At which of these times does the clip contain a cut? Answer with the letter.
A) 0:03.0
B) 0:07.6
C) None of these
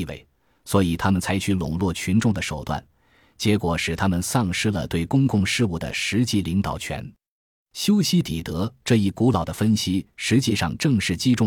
C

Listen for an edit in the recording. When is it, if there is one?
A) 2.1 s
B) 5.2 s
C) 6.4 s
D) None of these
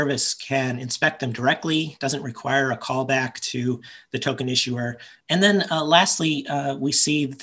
B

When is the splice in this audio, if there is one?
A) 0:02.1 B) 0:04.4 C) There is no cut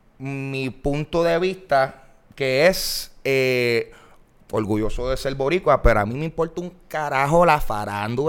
B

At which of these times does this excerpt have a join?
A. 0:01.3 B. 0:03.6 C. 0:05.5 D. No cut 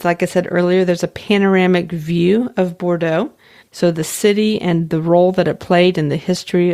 B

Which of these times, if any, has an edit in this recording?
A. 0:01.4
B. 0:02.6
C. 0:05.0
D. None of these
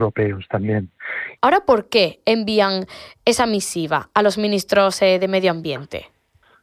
A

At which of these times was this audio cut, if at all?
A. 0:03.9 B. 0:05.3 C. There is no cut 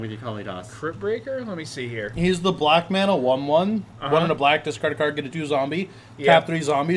B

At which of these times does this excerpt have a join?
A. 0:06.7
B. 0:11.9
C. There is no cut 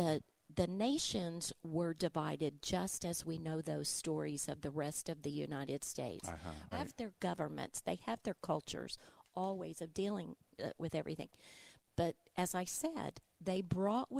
A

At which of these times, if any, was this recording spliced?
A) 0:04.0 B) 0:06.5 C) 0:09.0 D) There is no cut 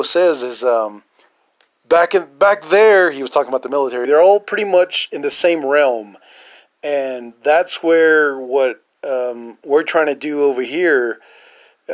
A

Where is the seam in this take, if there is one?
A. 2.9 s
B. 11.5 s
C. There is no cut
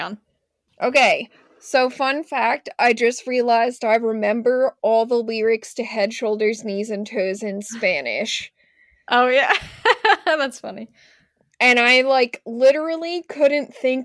B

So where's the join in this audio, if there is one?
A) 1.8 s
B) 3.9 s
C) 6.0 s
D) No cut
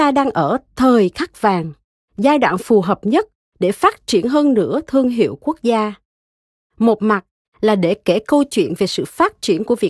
D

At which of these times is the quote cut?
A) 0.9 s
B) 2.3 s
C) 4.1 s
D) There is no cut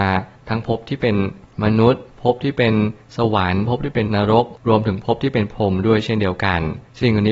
C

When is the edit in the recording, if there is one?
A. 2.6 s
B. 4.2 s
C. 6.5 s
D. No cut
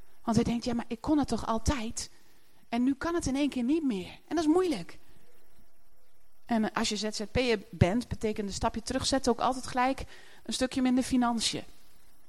C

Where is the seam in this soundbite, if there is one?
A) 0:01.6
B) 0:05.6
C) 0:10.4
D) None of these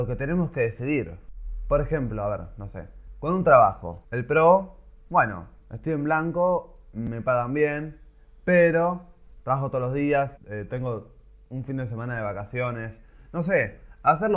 C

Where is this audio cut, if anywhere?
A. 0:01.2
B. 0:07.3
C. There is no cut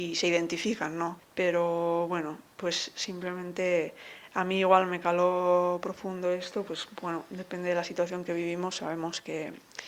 A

